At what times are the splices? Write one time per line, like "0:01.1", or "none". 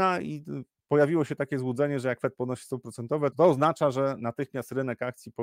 0:03.3